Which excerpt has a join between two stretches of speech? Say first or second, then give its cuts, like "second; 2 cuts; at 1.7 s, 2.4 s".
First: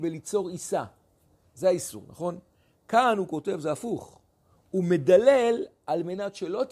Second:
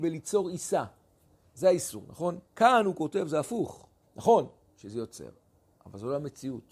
second; 2 cuts; at 2.5 s, 4.0 s